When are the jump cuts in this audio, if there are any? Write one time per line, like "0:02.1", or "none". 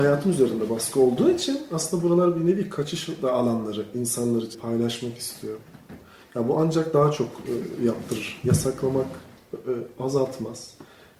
0:04.5